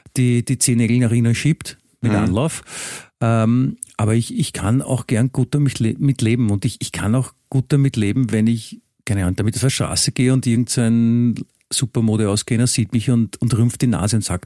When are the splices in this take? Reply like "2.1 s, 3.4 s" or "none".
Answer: none